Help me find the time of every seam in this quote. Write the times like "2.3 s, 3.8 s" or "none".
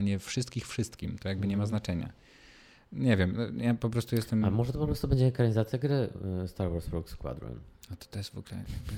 none

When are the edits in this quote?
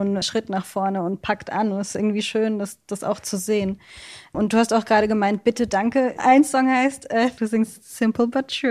6.1 s, 7.4 s

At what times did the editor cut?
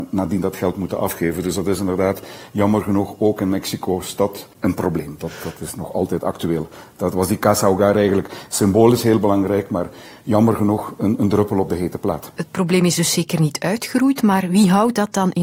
none

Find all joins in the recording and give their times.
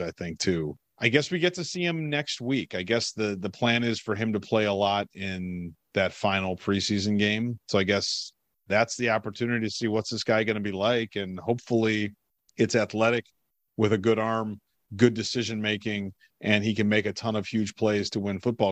none

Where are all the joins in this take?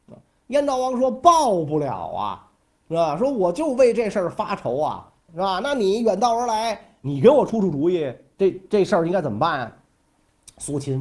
none

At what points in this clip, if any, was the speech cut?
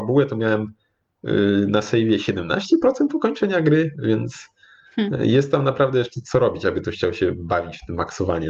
none

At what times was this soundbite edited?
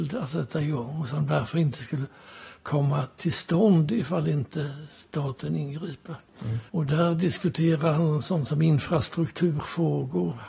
6.7 s

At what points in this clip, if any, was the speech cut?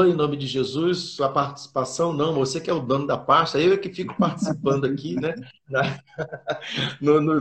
none

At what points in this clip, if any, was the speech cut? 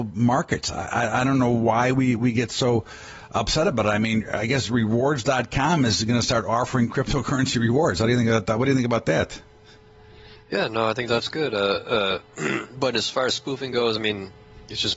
none

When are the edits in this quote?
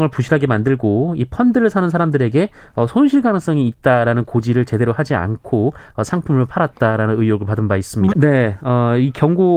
8.1 s

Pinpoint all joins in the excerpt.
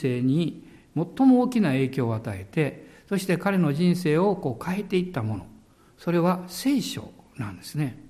none

